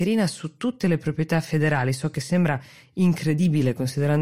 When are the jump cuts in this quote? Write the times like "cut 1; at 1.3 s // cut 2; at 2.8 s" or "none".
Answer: none